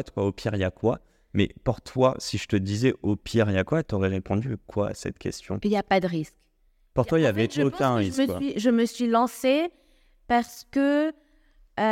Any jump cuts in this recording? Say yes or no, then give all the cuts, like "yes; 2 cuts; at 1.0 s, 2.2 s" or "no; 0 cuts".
no; 0 cuts